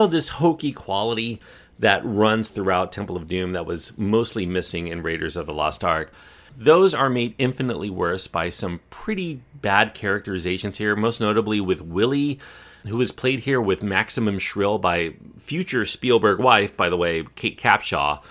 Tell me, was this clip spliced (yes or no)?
no